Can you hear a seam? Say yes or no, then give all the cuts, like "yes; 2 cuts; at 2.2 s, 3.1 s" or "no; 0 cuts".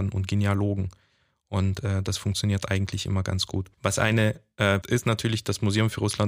yes; 2 cuts; at 3.7 s, 4.8 s